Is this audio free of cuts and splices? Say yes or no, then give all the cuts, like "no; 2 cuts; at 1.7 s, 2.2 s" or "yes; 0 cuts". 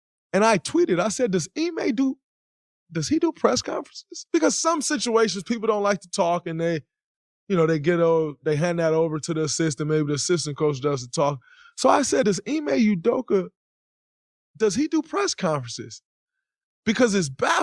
yes; 0 cuts